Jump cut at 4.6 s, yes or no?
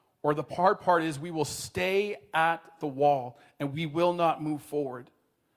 no